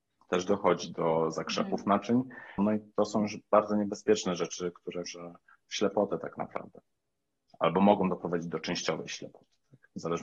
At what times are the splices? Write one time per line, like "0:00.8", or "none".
0:02.6
0:05.0